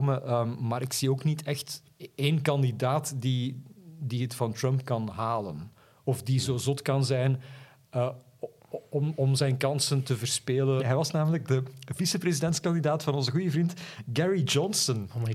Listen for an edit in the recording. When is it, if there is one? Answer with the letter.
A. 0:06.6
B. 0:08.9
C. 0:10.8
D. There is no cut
C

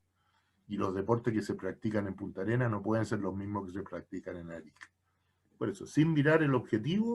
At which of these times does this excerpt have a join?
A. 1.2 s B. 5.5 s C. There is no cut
B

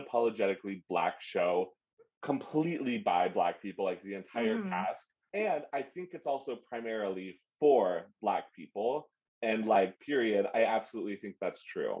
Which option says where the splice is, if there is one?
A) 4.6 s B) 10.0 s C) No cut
C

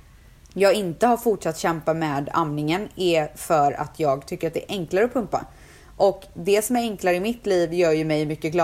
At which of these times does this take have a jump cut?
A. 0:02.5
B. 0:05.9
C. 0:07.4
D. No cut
D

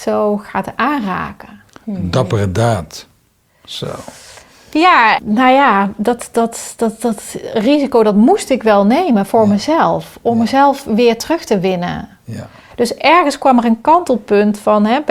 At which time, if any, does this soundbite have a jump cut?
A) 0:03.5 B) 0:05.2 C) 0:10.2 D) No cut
B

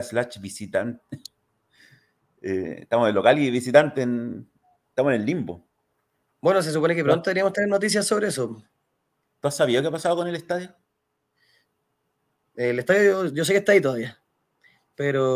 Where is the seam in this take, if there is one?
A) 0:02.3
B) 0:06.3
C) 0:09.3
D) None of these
D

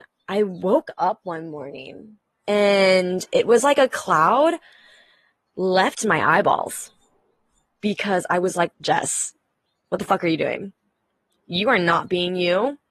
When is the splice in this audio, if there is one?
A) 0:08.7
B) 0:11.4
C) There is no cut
A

